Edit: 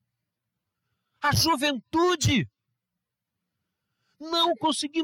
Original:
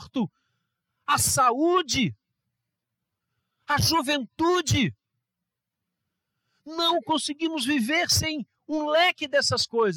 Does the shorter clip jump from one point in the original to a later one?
no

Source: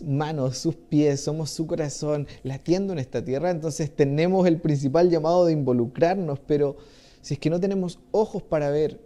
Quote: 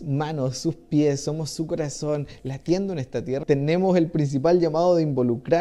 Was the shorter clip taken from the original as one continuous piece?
no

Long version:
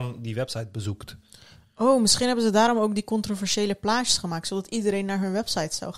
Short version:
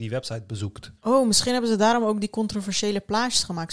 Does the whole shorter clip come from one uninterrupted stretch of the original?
no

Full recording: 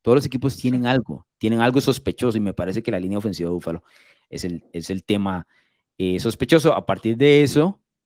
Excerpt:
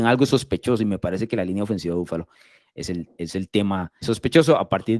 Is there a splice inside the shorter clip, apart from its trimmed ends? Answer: yes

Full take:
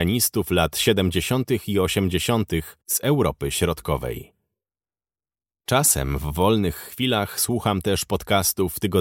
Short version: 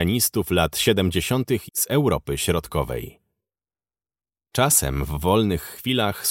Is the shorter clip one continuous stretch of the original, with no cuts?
no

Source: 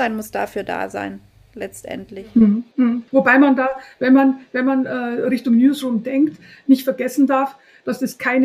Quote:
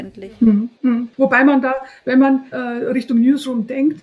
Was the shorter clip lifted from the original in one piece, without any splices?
no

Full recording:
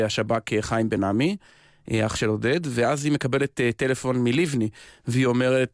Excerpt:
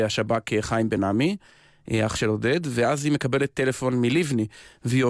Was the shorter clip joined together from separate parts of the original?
yes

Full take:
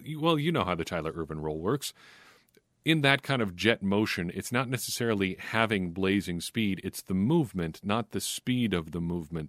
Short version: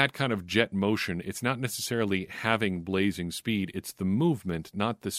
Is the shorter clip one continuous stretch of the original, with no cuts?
yes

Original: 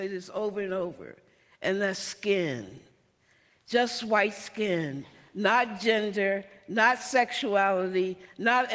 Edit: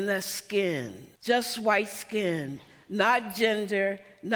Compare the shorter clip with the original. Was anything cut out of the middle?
yes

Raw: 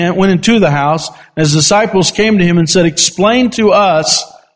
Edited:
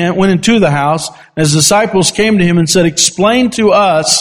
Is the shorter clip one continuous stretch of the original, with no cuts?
yes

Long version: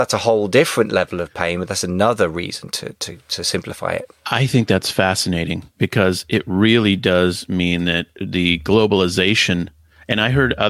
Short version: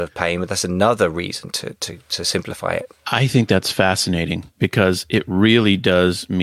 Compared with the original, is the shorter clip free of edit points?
yes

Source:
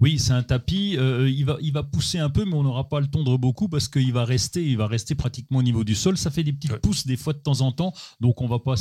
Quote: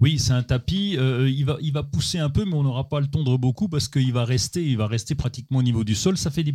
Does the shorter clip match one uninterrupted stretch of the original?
yes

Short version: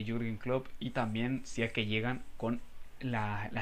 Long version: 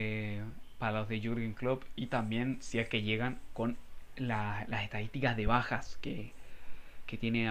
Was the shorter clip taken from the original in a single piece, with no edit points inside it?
yes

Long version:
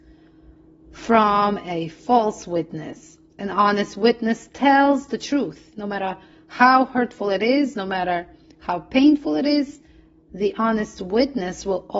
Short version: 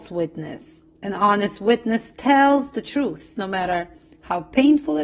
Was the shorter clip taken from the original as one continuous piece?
no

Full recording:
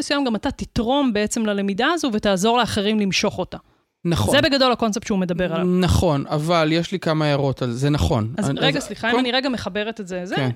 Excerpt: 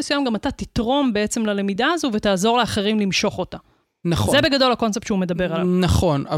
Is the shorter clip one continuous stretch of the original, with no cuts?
yes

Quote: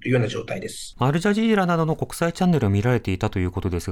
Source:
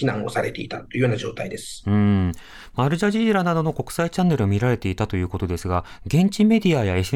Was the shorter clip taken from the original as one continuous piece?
no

